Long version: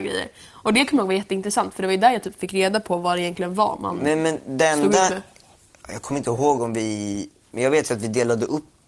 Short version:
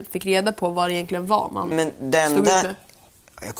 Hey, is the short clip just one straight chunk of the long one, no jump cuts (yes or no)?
no